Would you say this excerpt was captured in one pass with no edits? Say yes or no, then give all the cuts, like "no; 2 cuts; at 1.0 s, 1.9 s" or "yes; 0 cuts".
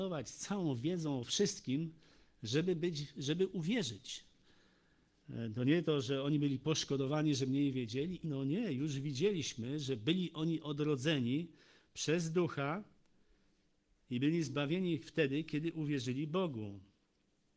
no; 2 cuts; at 5.2 s, 8.2 s